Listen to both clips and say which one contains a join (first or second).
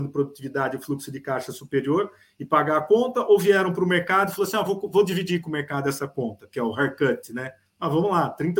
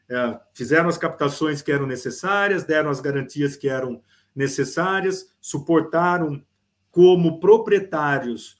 first